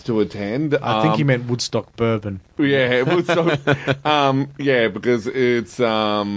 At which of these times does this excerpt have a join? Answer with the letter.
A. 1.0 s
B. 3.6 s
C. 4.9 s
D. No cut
D